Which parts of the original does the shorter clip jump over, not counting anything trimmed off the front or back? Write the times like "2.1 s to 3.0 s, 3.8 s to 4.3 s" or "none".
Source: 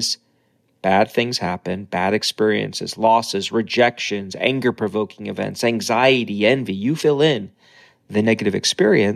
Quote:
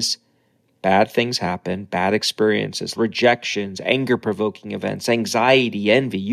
3.0 s to 3.5 s